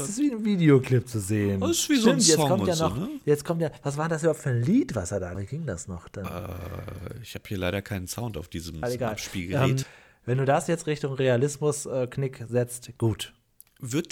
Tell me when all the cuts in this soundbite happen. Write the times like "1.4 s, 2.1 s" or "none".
5.3 s, 8.8 s, 9.8 s